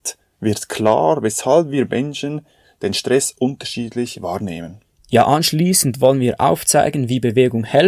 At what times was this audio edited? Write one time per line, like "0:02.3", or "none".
none